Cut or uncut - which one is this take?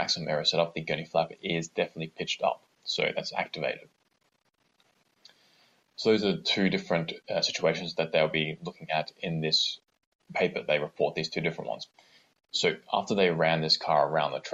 uncut